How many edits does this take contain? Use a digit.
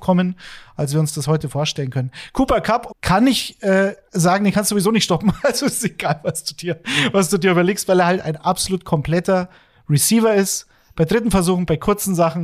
1